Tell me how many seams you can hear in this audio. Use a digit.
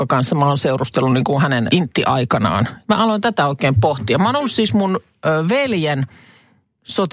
2